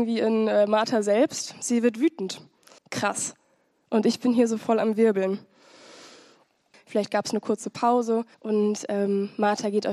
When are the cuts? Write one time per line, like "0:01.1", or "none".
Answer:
0:02.8
0:06.7
0:08.3